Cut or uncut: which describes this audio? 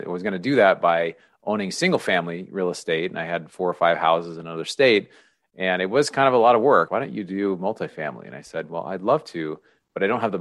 cut